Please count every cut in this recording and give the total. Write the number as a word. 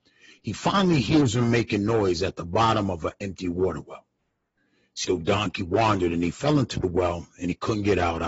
one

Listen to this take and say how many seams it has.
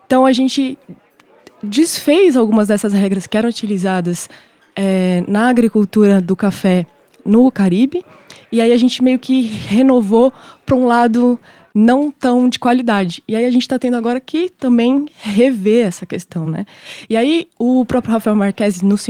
zero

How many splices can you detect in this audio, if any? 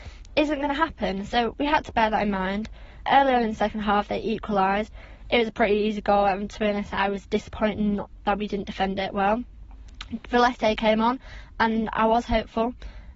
zero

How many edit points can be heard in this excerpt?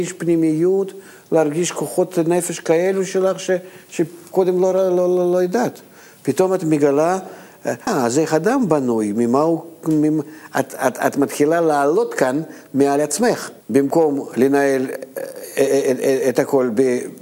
two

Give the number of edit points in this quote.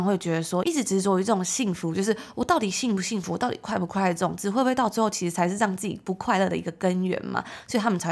zero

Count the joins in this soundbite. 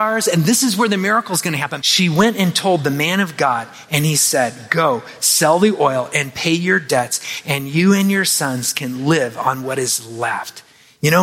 one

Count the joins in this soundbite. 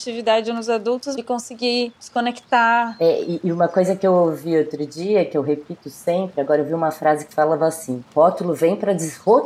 one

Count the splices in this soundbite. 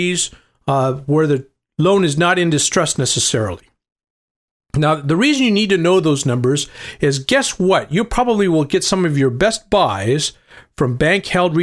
zero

